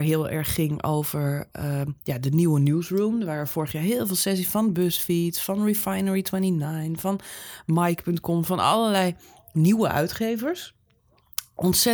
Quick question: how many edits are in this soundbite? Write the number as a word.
zero